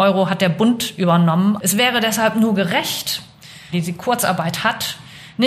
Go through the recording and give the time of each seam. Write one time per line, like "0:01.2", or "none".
0:01.6
0:03.7